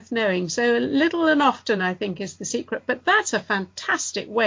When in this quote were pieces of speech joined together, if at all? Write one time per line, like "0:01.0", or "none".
none